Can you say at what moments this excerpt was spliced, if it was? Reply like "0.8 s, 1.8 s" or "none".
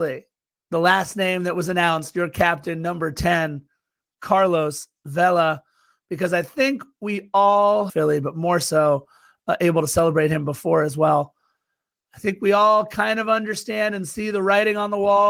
7.9 s